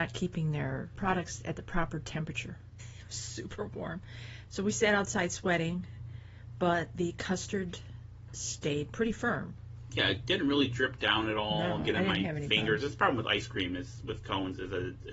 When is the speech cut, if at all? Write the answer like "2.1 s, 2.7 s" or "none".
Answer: 2.8 s